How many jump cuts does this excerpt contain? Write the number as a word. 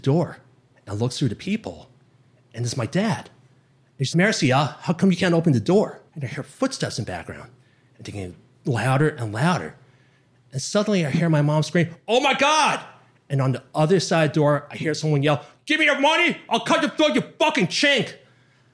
two